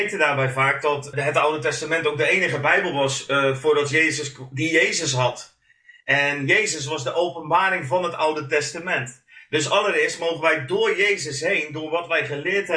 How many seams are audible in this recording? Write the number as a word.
one